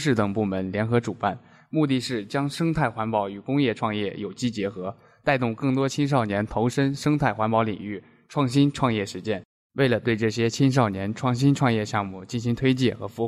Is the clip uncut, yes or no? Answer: yes